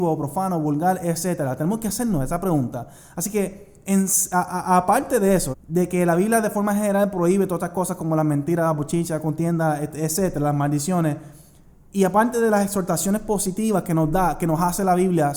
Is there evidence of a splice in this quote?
yes; 1 cut; at 5.5 s

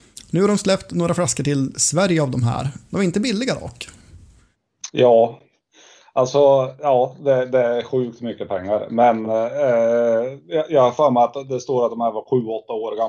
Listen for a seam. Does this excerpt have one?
yes; 1 cut; at 4.9 s

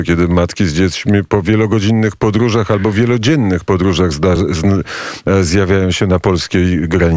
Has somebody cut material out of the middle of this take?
no; 0 cuts

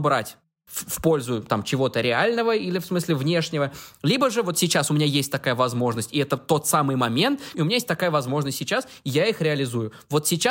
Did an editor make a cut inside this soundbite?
yes; 1 cut; at 7.5 s

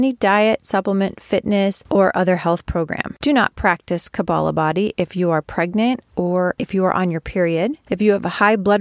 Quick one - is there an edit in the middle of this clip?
no; 0 cuts

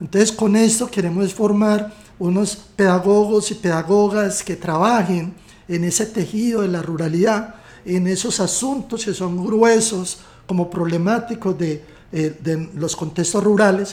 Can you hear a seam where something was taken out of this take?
yes; 1 cut; at 2.1 s

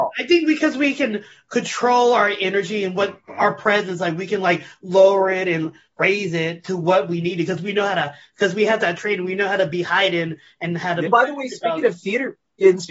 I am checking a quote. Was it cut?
yes; 1 cut; at 11.1 s

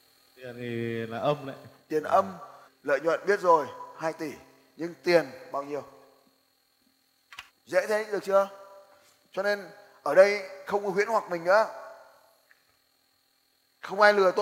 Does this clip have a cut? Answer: yes; 2 cuts; at 2.7 s, 7.5 s

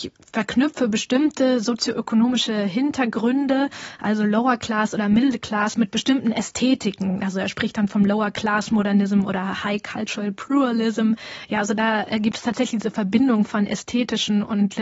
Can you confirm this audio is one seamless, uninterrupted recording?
yes; 0 cuts

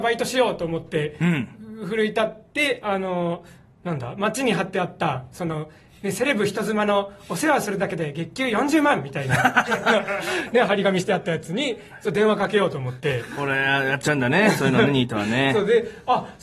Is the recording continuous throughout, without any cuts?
yes; 0 cuts

